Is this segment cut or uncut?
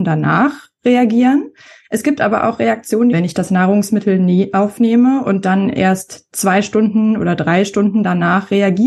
cut